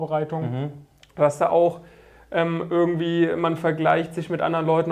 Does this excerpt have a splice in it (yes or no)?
no